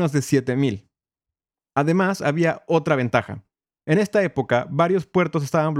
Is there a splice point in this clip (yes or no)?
no